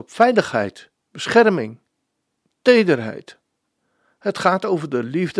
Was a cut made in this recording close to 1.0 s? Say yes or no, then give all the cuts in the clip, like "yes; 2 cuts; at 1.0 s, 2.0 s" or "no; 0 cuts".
yes; 1 cut; at 1.0 s